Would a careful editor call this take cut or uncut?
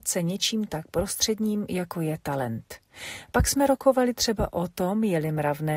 uncut